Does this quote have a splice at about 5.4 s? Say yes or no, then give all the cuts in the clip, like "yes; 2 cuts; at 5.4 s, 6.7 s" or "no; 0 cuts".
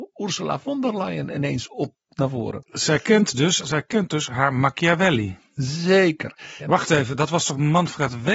no; 2 cuts; at 3.6 s, 6.6 s